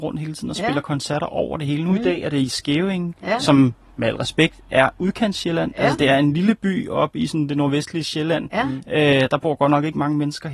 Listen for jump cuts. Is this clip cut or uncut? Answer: uncut